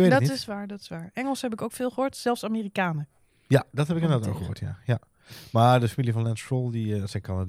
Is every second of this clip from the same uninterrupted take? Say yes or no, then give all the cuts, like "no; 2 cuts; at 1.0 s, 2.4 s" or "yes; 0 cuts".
yes; 0 cuts